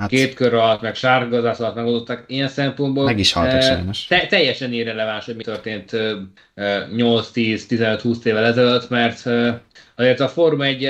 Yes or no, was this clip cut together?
no